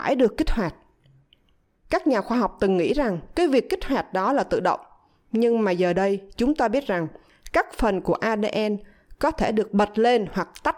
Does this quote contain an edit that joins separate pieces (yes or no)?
no